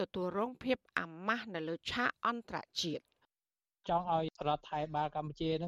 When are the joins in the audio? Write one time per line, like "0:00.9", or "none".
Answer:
none